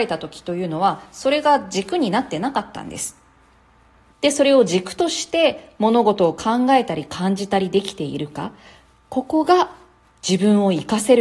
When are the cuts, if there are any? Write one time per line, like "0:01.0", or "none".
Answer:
0:04.1